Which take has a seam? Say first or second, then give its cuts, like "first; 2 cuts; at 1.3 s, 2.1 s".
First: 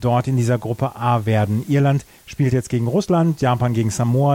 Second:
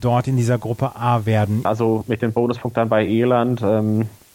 second; 1 cut; at 1.7 s